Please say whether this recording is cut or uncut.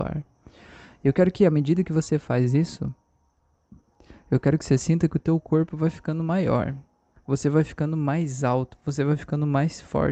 uncut